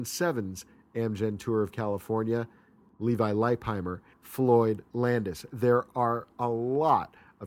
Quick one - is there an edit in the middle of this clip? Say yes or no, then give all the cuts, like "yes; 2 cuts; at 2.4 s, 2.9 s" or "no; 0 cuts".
yes; 1 cut; at 4.1 s